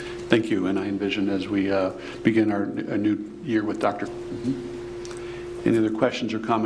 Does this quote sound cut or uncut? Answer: cut